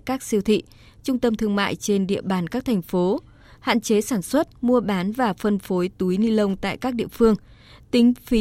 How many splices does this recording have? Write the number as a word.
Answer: one